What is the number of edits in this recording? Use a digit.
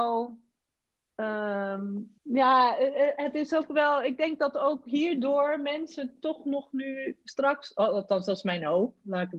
1